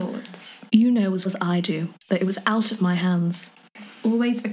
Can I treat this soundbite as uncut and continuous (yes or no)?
no